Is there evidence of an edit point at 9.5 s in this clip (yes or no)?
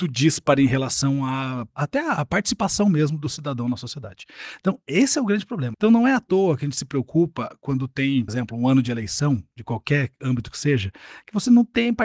no